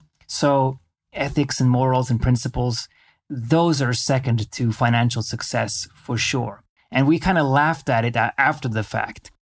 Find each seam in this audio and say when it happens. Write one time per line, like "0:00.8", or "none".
0:06.8